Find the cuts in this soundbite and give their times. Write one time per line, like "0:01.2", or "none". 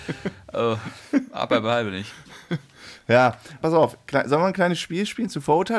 0:03.6